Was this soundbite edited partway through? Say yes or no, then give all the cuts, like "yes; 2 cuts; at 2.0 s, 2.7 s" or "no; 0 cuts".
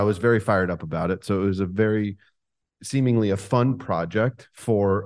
no; 0 cuts